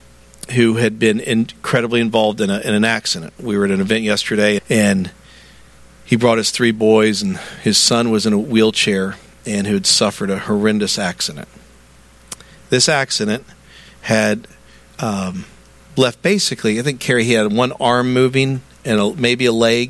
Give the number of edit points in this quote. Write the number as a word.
one